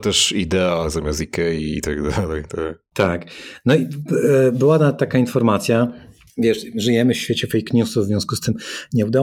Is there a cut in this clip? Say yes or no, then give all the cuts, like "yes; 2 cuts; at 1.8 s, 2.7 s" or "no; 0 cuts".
no; 0 cuts